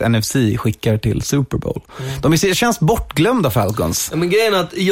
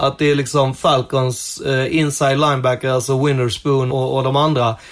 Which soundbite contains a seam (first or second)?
second